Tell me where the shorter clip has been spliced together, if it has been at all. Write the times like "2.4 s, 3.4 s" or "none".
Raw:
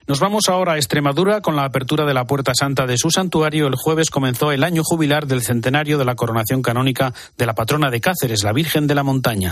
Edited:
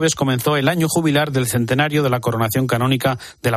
none